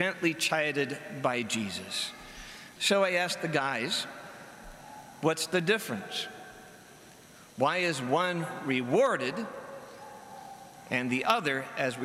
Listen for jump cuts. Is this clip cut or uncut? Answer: cut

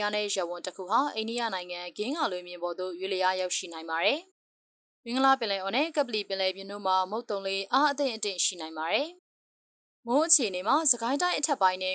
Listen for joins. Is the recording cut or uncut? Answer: cut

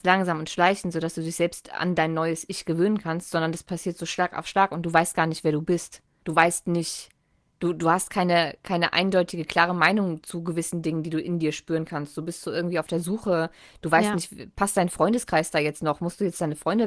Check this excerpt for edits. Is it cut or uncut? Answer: cut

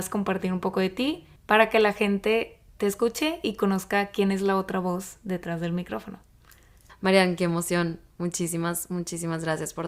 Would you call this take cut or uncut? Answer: cut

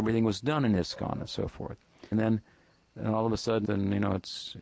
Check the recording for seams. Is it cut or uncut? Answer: cut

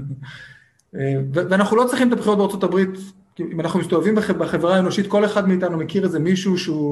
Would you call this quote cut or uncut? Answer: uncut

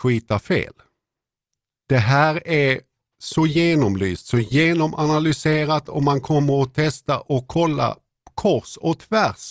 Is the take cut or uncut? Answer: uncut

